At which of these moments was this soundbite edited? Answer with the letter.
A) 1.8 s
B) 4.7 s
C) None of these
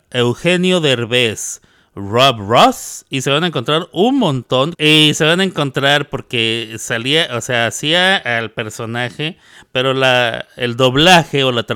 B